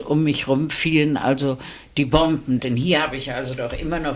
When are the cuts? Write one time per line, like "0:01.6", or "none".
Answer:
0:02.6